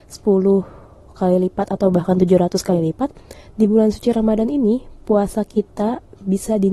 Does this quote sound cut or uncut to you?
uncut